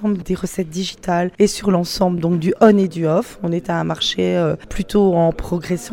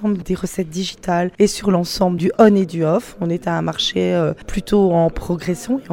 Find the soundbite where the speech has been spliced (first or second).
second